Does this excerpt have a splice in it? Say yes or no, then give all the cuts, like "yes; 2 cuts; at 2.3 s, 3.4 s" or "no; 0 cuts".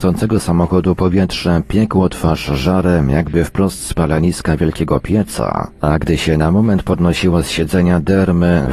no; 0 cuts